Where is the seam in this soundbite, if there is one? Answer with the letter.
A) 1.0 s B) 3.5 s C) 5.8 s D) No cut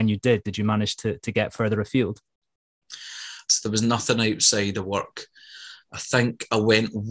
B